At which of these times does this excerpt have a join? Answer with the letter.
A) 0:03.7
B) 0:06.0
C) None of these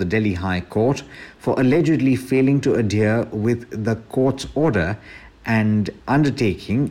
B